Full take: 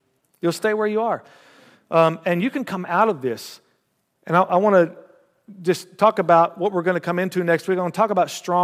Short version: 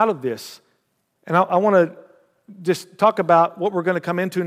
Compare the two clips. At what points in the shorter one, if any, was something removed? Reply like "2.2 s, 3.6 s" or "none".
none